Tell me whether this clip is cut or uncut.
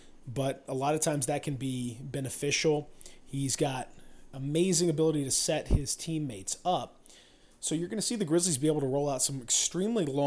uncut